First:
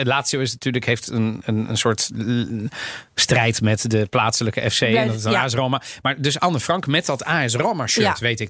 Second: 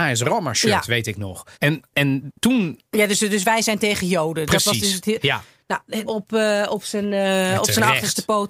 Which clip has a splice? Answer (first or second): second